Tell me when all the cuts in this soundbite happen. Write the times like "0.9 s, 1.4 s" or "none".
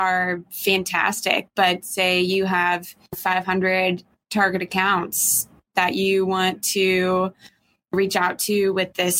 none